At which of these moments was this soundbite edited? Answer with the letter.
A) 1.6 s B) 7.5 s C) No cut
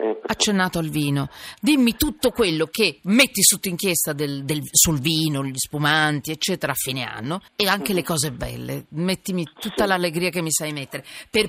B